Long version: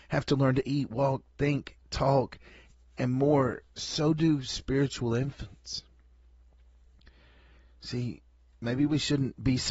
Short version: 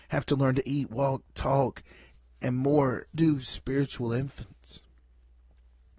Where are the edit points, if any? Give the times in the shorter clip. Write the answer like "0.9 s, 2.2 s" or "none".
1.3 s, 3.1 s